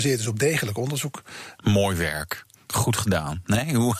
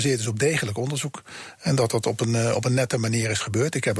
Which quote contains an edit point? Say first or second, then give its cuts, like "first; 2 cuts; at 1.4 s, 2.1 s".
first; 1 cut; at 1.6 s